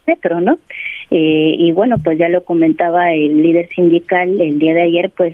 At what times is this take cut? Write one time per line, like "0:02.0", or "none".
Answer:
none